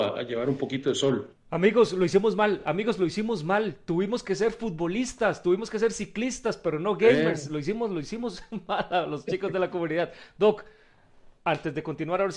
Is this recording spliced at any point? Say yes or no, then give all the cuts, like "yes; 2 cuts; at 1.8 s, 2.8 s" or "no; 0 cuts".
no; 0 cuts